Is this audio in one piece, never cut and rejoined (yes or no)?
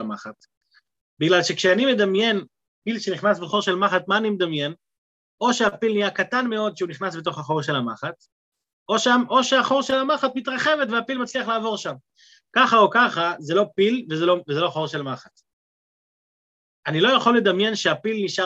yes